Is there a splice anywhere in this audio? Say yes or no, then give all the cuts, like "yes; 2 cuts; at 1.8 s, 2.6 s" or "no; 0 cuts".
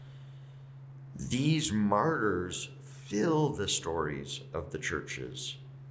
no; 0 cuts